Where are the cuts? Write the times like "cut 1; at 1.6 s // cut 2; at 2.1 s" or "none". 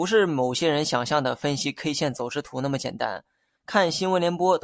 cut 1; at 3.6 s